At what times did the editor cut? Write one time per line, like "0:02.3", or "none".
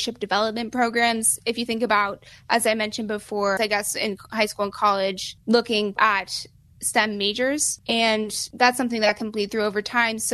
0:03.6